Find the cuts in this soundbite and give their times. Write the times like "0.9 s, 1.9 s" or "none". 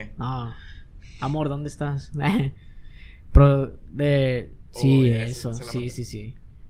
none